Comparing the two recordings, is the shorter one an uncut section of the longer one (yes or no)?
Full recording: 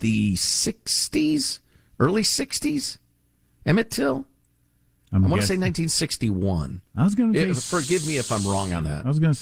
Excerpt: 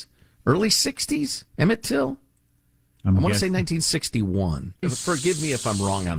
no